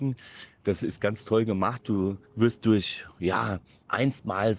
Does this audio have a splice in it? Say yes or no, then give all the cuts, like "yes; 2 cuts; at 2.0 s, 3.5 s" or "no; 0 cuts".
yes; 1 cut; at 2.2 s